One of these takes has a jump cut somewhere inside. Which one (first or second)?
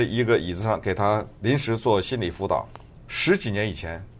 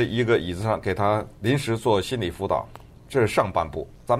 first